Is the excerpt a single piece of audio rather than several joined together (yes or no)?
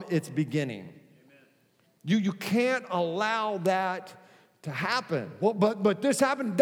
yes